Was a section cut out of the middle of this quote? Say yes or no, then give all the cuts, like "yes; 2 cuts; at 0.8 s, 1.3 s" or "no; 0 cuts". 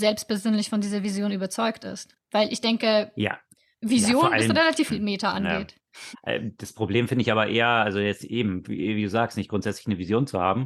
yes; 2 cuts; at 4.9 s, 6.1 s